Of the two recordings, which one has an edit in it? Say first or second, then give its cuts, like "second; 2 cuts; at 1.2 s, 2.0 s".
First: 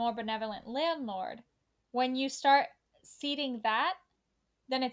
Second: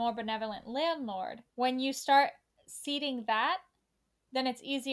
second; 1 cut; at 1.5 s